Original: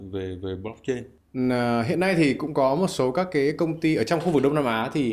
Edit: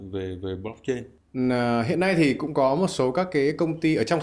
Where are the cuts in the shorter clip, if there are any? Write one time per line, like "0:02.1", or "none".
none